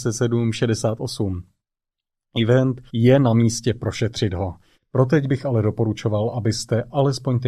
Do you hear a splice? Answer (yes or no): yes